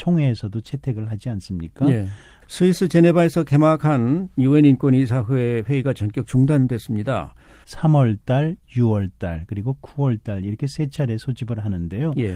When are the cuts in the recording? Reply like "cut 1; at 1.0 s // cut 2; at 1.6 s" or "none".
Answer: cut 1; at 2.4 s // cut 2; at 7.6 s